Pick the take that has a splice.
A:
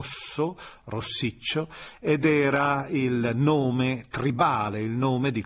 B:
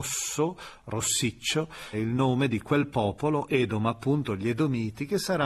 B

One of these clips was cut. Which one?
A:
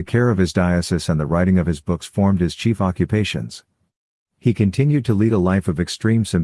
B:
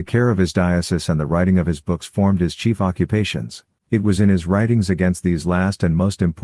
B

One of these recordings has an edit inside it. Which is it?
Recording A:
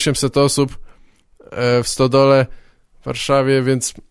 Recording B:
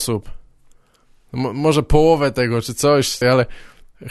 B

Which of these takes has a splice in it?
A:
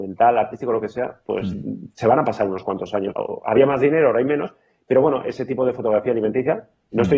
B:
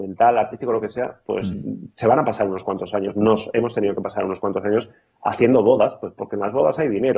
A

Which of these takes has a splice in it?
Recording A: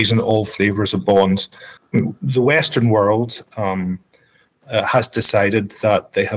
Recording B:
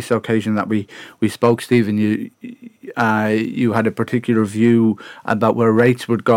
A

